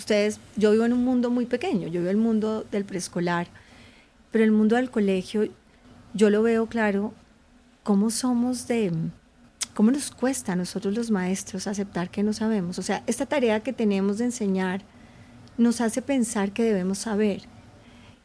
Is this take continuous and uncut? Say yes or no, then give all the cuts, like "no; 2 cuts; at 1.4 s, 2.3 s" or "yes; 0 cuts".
yes; 0 cuts